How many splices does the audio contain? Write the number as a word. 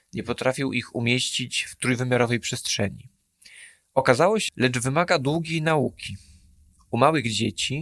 one